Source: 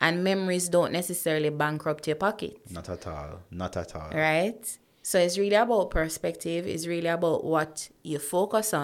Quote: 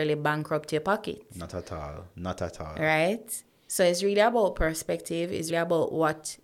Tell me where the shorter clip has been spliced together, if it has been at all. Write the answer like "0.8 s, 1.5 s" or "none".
5.5 s